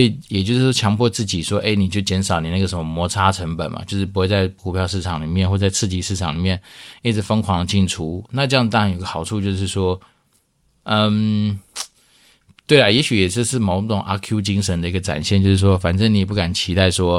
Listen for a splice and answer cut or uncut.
uncut